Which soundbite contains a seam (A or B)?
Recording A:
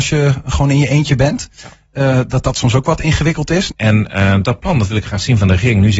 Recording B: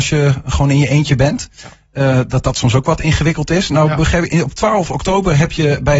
A